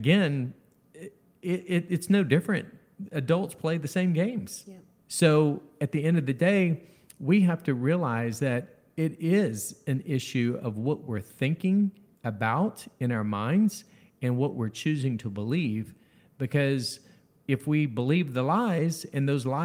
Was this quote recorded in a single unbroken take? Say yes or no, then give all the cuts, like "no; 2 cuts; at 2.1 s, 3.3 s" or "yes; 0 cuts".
no; 1 cut; at 5.0 s